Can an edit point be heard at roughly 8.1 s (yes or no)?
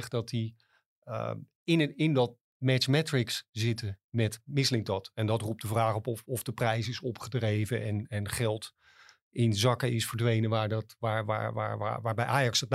no